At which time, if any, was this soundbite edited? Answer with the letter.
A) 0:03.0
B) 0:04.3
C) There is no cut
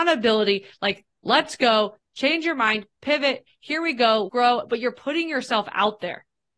B